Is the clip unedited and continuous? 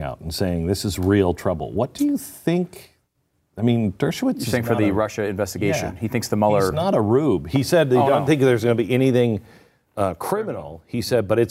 yes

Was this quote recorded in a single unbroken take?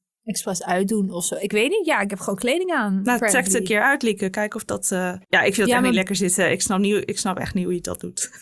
no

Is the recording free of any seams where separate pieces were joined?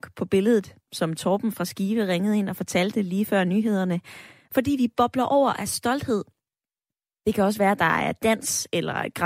yes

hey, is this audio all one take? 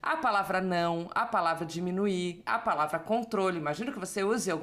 yes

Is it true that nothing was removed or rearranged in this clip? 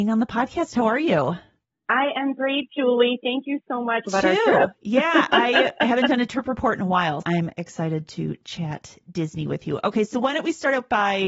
no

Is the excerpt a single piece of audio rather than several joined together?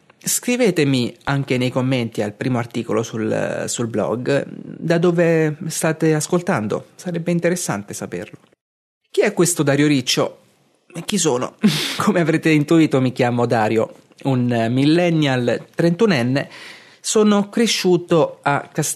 yes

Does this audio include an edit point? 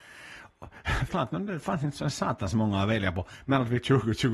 yes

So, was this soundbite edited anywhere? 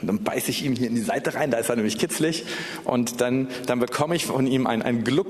no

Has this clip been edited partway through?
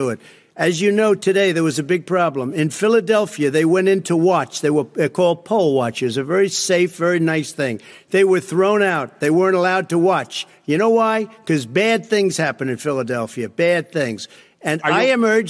no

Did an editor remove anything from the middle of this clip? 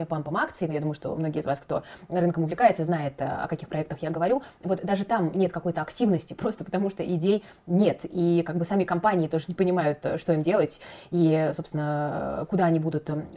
no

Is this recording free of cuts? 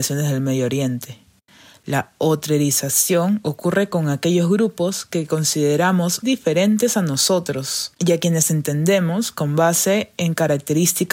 no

